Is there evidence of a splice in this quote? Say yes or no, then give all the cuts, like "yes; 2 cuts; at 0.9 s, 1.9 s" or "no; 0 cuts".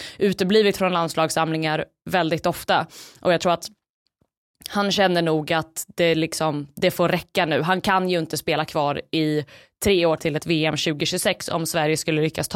yes; 1 cut; at 10.2 s